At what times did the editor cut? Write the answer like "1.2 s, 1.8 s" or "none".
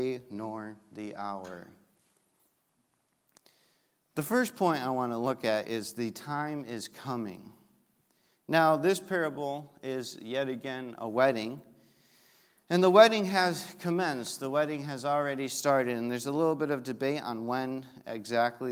none